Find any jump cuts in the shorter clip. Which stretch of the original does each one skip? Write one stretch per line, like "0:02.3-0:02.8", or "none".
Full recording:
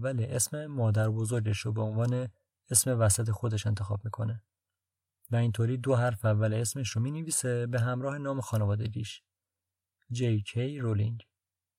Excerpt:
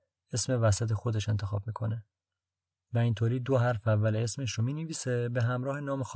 none